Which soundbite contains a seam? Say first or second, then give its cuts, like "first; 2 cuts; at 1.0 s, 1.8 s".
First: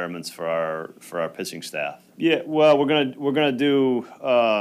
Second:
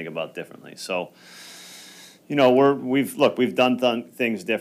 first; 1 cut; at 2.1 s